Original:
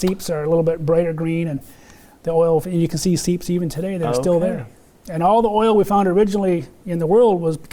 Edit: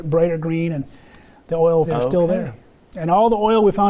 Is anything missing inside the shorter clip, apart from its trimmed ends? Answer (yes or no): yes